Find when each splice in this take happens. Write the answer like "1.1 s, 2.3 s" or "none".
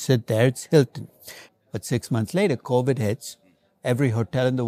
1.5 s